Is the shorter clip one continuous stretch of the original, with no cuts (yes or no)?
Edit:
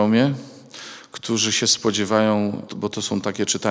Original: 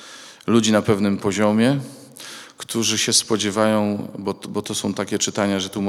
no